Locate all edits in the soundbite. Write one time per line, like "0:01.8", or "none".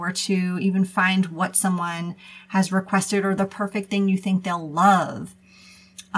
none

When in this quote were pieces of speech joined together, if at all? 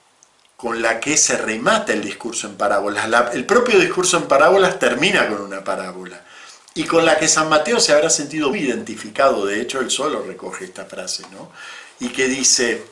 0:08.5

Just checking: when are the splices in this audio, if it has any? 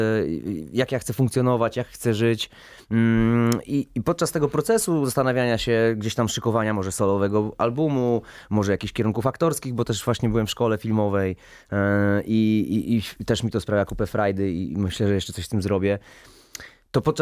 none

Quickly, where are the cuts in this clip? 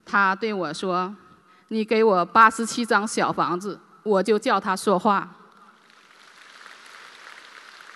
none

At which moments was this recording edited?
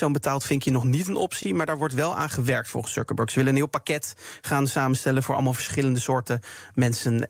none

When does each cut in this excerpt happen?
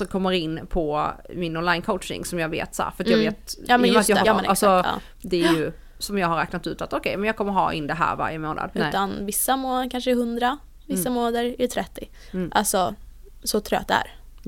0:04.2
0:08.7

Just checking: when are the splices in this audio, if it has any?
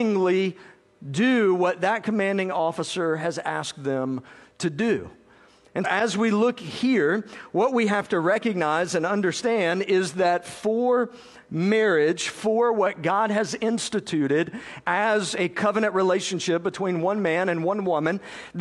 0:05.8

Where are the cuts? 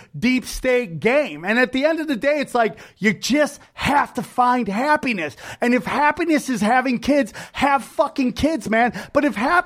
none

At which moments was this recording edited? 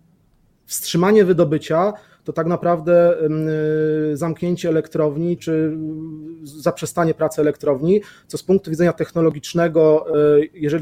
0:05.4

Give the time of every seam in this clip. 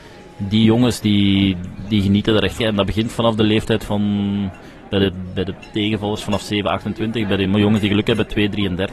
0:02.6

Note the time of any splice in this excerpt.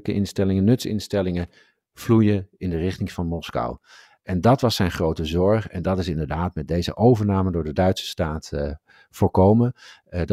none

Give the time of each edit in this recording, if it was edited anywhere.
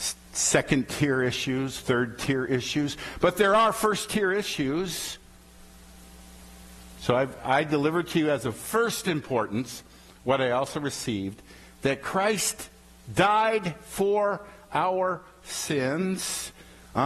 0:07.4

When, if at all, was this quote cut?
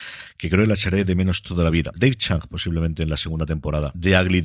0:01.9

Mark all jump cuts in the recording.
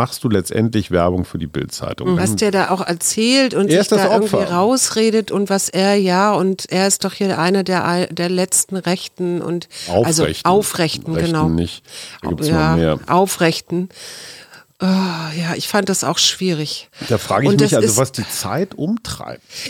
0:02.2

